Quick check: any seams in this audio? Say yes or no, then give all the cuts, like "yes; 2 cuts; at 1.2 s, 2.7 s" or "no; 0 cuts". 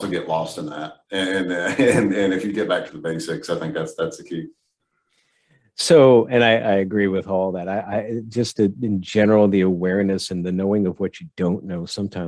no; 0 cuts